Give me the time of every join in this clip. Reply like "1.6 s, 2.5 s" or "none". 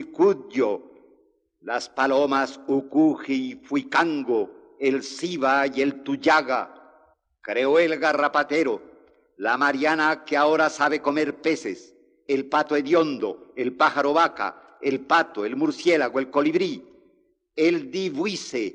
none